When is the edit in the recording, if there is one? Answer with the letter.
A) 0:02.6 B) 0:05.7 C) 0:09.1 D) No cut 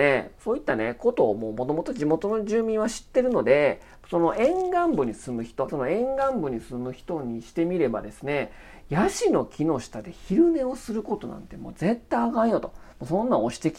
B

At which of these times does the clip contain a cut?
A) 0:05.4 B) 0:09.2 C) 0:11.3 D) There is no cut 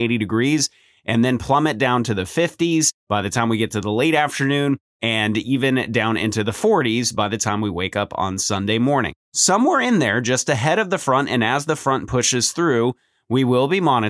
D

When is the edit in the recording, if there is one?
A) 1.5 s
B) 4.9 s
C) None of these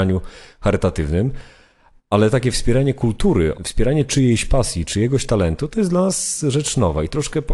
C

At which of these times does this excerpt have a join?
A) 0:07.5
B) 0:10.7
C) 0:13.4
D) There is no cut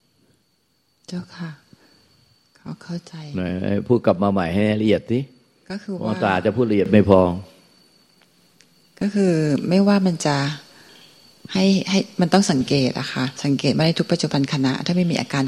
C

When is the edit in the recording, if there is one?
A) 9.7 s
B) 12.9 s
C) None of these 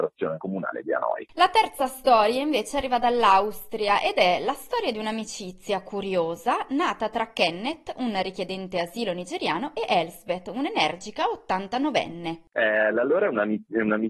C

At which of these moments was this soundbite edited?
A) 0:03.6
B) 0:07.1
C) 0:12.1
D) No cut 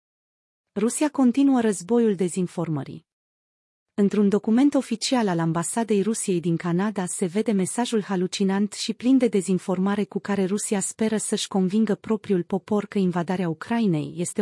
D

